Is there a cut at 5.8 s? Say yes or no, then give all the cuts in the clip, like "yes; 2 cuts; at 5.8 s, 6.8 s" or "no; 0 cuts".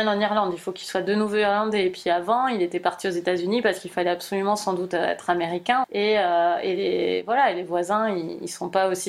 yes; 1 cut; at 5.8 s